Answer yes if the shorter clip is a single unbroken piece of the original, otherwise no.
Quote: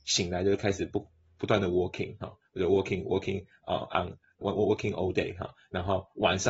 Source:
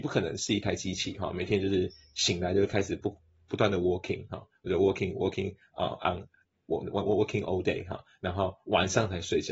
no